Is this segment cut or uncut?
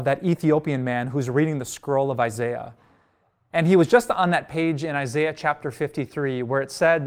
uncut